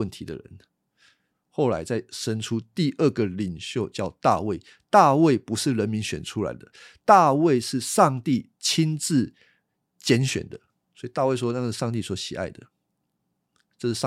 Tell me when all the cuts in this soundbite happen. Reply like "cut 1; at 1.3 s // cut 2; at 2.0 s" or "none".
cut 1; at 1.3 s